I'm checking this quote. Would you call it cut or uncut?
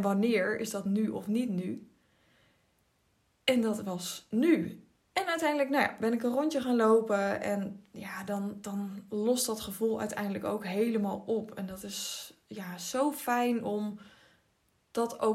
cut